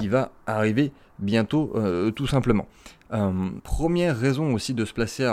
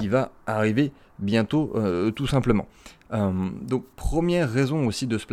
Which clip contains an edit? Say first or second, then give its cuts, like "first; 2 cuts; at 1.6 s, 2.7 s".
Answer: first; 1 cut; at 3.6 s